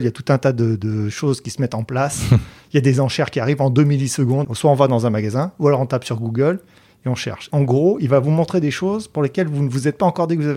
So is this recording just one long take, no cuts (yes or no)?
no